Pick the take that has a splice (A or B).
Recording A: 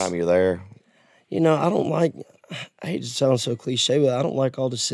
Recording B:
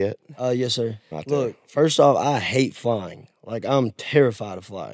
B